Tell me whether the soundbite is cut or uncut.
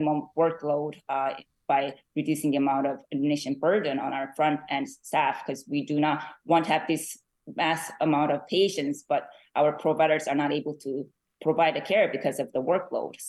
uncut